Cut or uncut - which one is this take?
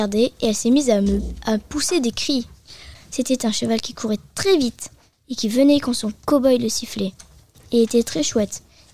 cut